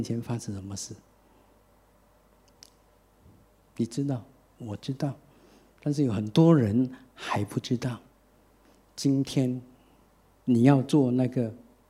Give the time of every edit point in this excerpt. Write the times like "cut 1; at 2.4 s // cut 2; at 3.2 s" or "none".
none